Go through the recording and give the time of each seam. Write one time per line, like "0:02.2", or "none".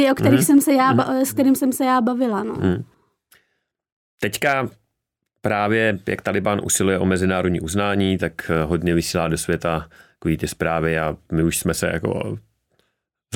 none